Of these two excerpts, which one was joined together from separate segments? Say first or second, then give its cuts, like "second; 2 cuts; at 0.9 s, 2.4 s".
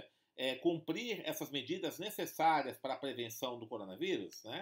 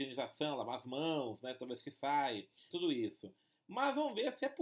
second; 1 cut; at 2.7 s